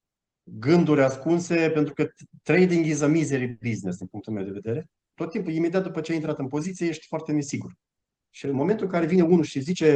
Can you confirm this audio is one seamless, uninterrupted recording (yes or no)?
no